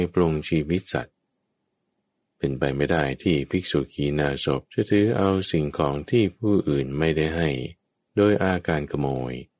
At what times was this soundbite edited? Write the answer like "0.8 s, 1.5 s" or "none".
4.7 s